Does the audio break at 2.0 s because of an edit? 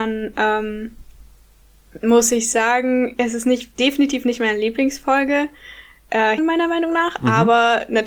no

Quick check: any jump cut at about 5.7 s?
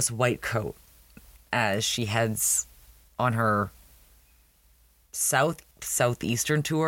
yes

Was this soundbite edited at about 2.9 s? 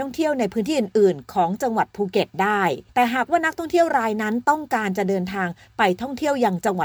yes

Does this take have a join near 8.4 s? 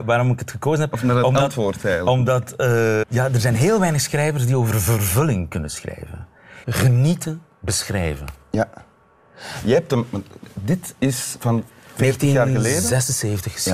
no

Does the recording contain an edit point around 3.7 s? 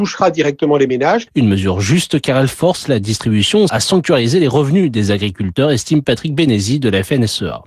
yes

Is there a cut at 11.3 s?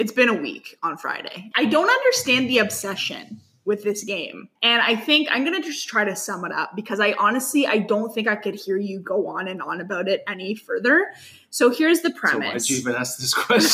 no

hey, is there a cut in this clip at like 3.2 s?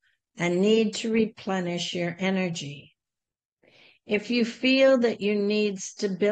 no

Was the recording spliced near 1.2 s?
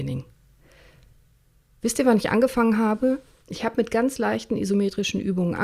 no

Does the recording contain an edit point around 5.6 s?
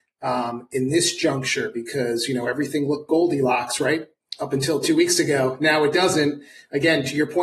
no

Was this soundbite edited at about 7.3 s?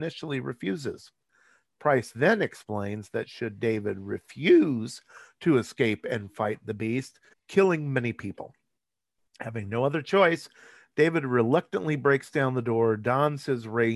yes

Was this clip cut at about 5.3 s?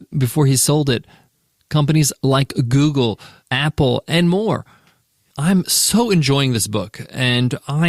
yes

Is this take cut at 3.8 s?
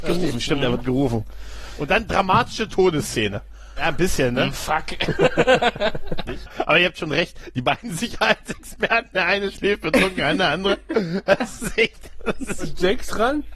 yes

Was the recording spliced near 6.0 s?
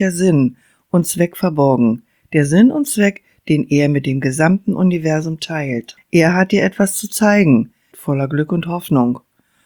yes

